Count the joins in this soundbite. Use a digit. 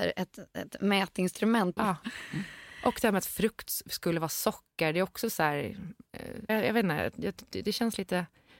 2